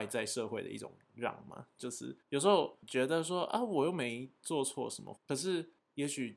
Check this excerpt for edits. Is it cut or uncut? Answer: cut